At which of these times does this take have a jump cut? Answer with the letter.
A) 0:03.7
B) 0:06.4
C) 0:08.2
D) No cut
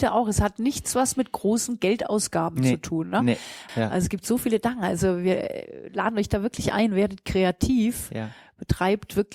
A